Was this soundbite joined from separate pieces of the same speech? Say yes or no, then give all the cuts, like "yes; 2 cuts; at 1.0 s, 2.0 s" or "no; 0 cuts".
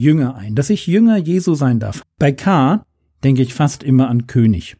yes; 1 cut; at 2.0 s